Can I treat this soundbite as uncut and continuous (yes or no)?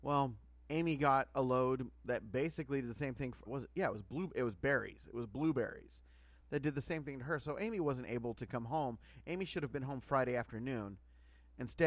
no